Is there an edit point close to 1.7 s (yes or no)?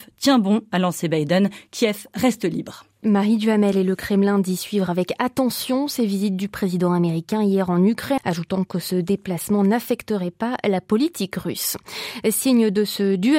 no